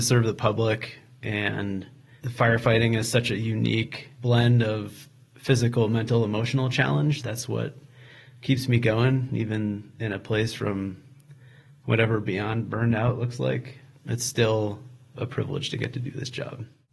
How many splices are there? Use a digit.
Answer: 0